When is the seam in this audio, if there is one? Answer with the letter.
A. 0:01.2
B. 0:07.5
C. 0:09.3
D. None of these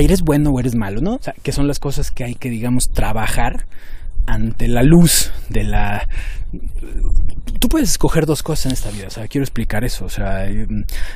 A